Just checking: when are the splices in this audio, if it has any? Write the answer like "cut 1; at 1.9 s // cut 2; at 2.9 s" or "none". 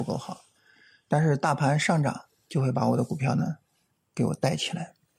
none